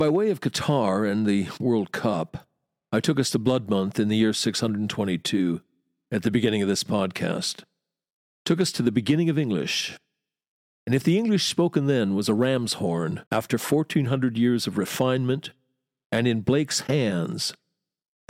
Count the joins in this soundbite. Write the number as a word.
one